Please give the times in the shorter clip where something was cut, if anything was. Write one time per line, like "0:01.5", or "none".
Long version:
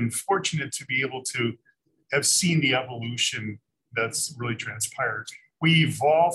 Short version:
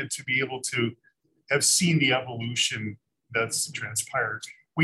0:03.7